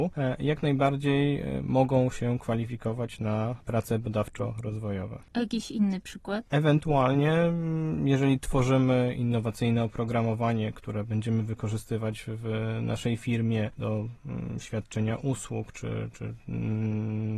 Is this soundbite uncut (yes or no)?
yes